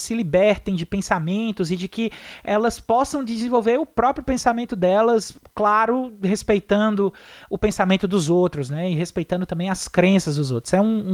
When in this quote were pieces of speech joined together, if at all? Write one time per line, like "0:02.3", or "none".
none